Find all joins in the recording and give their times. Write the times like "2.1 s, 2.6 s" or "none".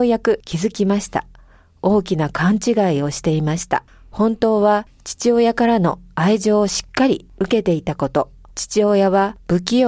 8.5 s